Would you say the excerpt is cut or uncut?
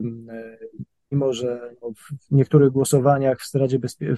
uncut